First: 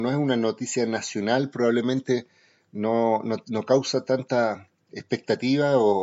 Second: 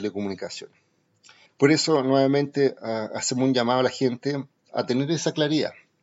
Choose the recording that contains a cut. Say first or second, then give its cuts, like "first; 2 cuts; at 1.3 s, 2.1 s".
second; 1 cut; at 1.5 s